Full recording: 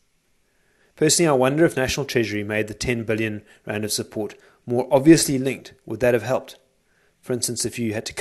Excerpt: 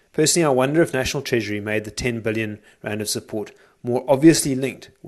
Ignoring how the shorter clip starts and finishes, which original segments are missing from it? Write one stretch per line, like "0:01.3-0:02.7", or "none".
none